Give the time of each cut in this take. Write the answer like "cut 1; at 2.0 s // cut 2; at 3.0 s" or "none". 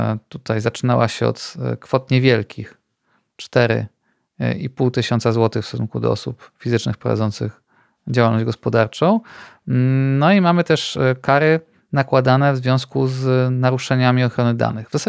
none